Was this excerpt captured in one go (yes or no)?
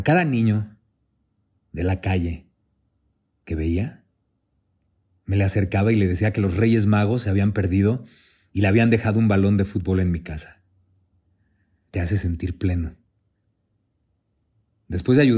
no